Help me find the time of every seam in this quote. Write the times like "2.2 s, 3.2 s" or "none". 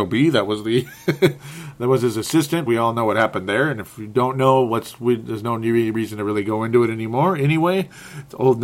none